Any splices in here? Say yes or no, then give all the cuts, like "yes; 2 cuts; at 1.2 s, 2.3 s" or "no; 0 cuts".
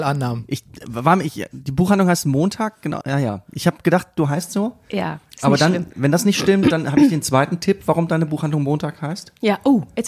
yes; 1 cut; at 3.0 s